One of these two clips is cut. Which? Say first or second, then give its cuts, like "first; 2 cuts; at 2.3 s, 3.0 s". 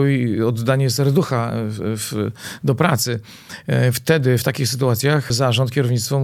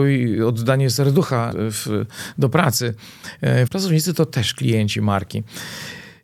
second; 2 cuts; at 1.5 s, 3.7 s